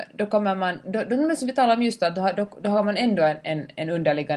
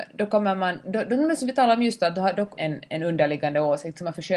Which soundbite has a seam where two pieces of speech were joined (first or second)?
second